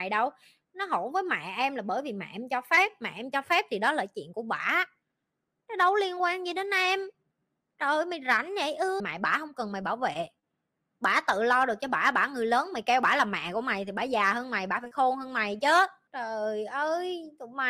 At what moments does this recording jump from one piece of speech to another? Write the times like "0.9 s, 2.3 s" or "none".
9.0 s